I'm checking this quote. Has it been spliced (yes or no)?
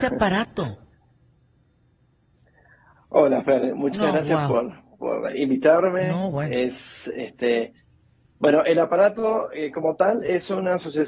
no